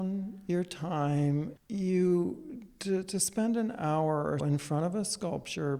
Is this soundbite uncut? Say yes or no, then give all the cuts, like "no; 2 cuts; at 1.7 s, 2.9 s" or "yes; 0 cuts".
no; 1 cut; at 4.4 s